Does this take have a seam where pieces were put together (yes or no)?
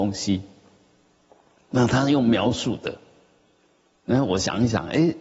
no